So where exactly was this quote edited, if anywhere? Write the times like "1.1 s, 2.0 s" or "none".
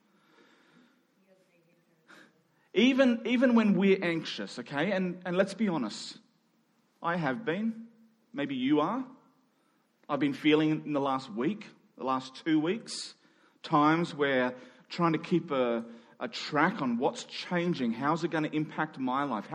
none

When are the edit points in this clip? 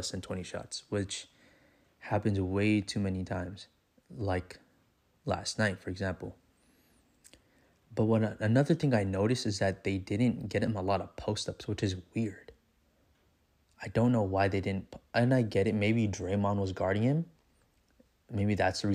none

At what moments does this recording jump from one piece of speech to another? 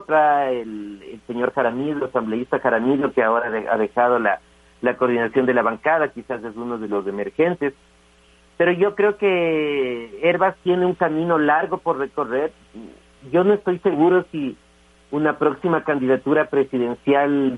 none

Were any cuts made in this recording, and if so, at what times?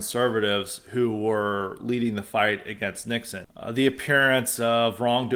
3.4 s

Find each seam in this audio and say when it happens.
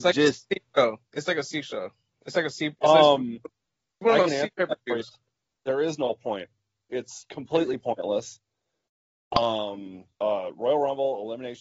10.2 s

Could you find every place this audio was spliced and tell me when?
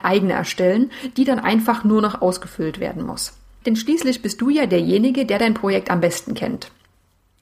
3.6 s

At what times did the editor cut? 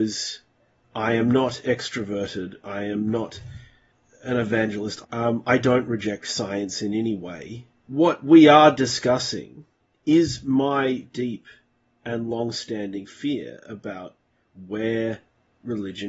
5.0 s, 7.8 s, 11.0 s

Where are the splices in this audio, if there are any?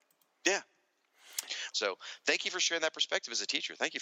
1.7 s

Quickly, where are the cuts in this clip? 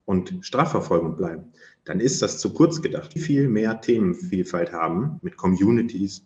3.2 s, 5.2 s

